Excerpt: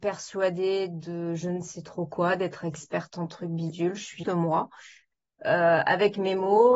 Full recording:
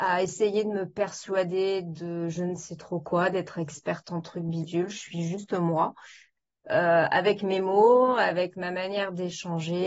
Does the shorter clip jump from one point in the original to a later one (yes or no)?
yes